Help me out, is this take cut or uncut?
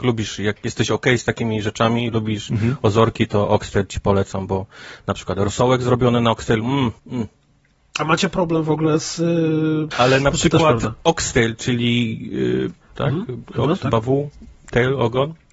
cut